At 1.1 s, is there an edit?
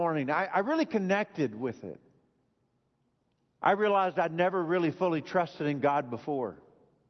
no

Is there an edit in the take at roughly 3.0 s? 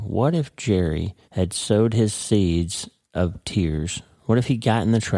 no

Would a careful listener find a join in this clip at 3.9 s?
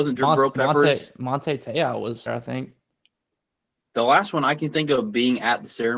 no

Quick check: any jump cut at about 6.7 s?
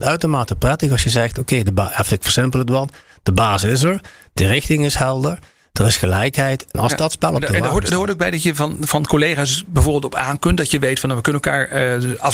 yes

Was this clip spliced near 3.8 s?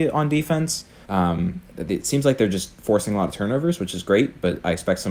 no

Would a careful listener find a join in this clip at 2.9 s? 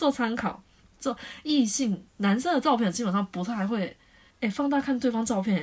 no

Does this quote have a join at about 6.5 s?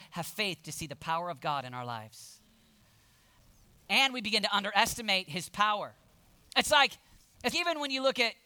yes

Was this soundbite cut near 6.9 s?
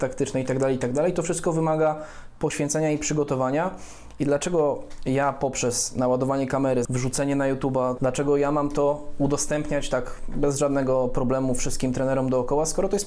yes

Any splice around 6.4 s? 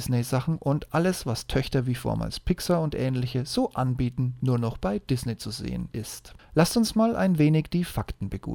yes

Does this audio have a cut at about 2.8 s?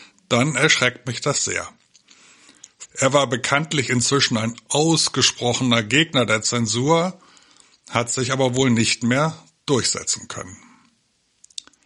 yes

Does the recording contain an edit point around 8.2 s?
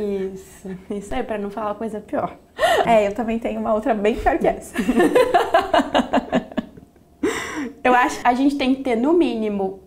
yes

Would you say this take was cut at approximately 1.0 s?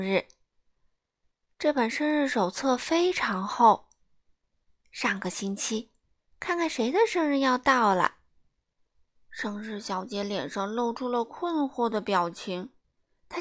no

